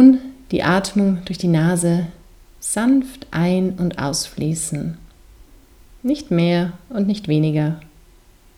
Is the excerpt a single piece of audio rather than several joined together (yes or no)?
yes